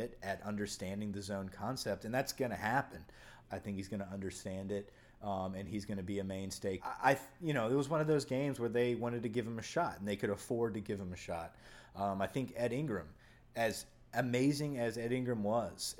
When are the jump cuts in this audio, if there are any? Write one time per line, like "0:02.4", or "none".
0:03.4
0:06.8

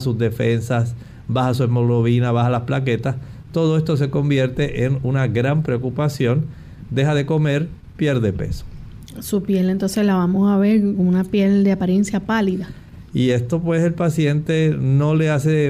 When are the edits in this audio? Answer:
0:13.1

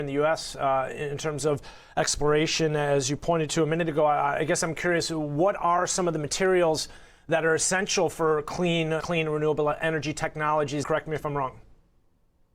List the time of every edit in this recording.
0:09.0
0:10.8

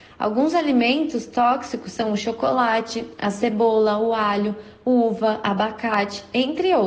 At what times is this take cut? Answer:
none

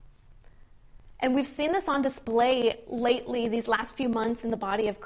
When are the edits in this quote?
none

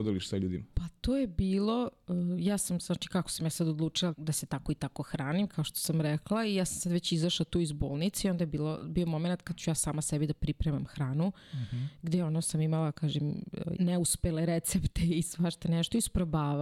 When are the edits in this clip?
0:04.1
0:13.8

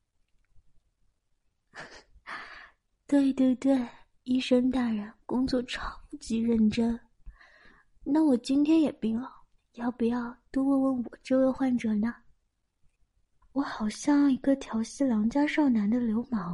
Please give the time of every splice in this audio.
0:09.6
0:13.4

